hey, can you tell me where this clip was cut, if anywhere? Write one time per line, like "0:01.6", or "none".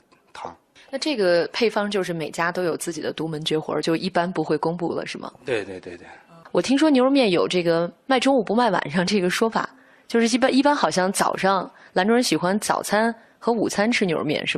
none